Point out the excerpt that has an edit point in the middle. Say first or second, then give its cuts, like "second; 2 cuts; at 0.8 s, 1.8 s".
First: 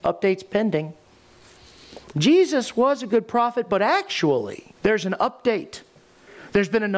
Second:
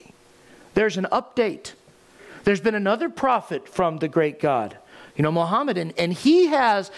first; 2 cuts; at 2.1 s, 4.8 s